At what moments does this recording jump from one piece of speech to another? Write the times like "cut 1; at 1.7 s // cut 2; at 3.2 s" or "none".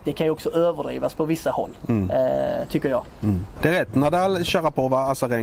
cut 1; at 3.6 s